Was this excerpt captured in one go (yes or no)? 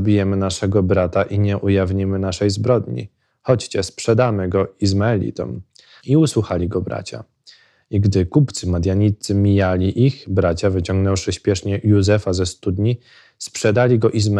no